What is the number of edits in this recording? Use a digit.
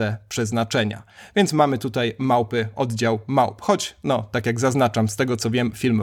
0